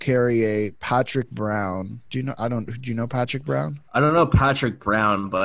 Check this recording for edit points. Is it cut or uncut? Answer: uncut